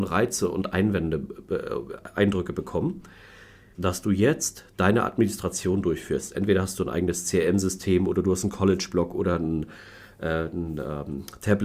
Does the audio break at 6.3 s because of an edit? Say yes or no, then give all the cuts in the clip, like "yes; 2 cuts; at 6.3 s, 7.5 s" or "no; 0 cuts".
no; 1 cut; at 3.7 s